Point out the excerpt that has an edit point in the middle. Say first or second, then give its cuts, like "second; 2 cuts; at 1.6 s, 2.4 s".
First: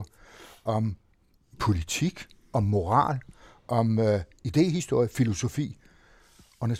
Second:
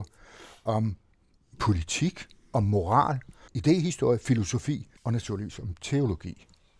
second; 2 cuts; at 3.5 s, 5.0 s